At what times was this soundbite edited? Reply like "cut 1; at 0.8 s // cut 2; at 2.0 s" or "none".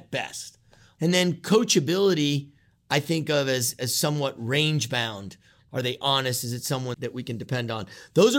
cut 1; at 5.7 s // cut 2; at 6.9 s